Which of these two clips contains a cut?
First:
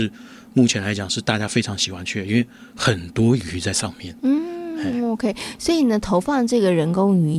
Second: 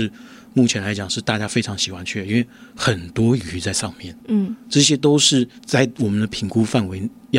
second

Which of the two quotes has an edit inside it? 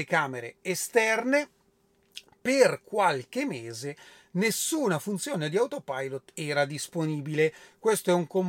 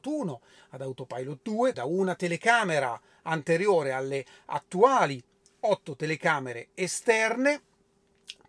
second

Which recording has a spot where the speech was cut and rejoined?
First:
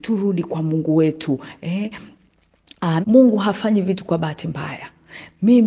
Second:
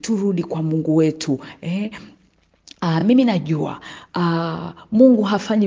first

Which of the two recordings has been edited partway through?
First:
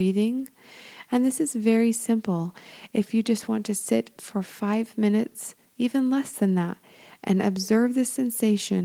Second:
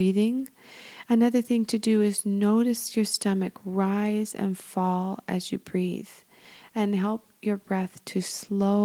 second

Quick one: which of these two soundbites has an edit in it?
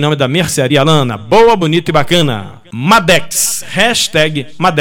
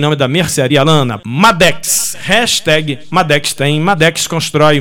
second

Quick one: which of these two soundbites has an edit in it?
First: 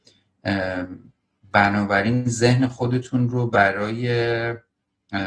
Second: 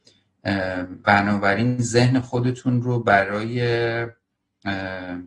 second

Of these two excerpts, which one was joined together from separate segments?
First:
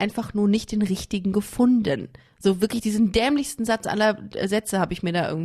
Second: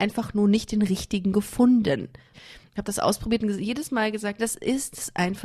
second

